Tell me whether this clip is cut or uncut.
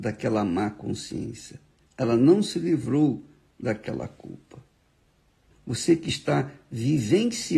cut